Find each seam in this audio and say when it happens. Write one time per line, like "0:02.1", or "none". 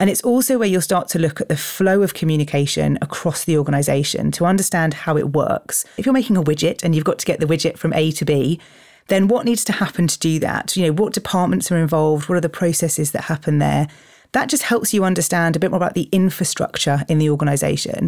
0:06.0